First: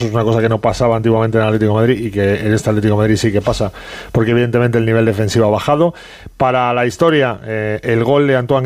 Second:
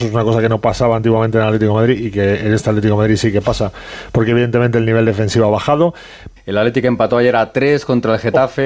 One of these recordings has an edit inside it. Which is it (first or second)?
second